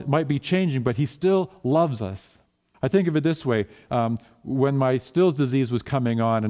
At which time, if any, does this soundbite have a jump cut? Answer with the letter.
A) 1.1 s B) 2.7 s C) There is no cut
B